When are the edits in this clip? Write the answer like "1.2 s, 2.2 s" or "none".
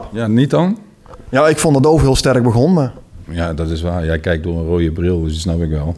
none